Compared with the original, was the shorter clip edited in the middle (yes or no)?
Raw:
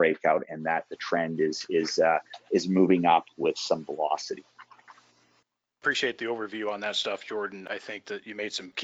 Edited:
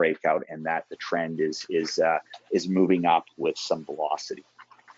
no